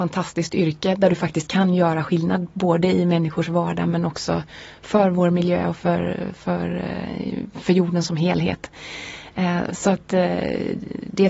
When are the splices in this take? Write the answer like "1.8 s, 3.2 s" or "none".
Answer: 9.7 s